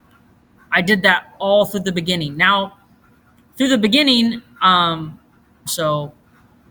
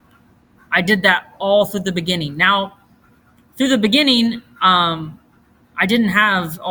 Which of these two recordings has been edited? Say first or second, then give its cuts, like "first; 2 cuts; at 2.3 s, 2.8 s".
first; 1 cut; at 5.7 s